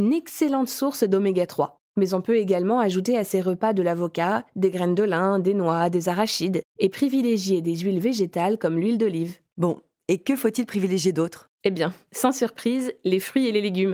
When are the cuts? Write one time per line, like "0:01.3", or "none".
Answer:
0:09.5